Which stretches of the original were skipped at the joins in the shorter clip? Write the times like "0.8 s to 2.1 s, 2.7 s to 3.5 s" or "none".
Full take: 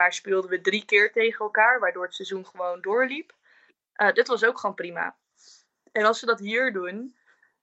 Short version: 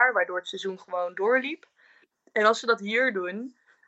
3.8 s to 5.7 s